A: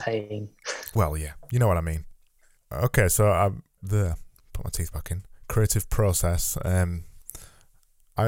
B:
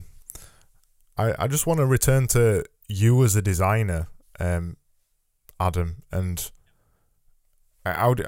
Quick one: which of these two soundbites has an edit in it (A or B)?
A